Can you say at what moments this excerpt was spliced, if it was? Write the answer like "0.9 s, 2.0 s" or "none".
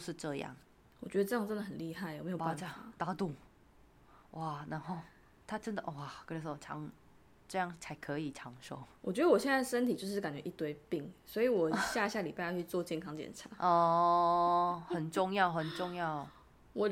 none